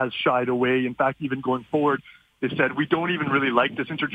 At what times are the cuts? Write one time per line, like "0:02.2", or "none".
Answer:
none

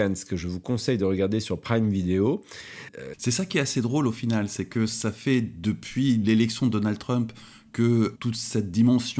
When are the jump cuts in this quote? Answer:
0:03.1
0:08.2

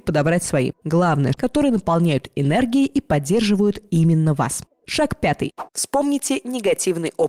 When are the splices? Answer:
0:01.3

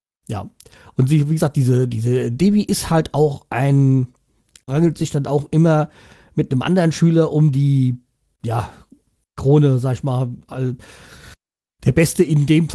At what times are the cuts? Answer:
0:04.7

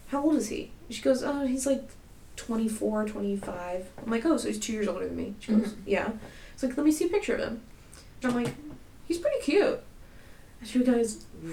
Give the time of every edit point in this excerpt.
0:08.2

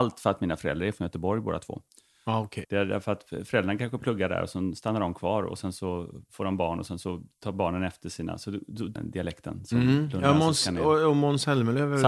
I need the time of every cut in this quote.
0:02.6
0:09.0

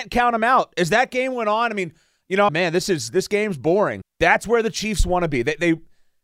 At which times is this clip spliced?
0:02.5
0:04.0

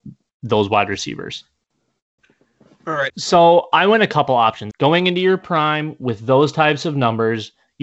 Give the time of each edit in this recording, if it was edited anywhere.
0:03.1
0:04.7

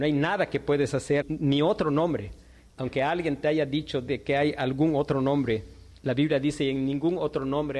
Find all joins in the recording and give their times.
0:01.2

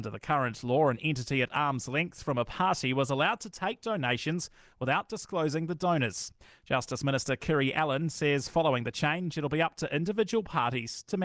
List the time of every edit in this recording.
none

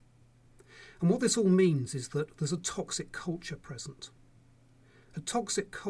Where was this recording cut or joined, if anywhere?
none

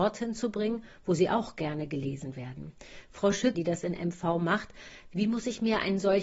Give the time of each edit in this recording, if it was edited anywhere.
0:03.5

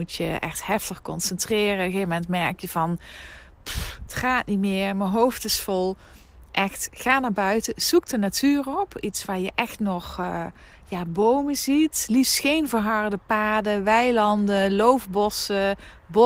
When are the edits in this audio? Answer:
none

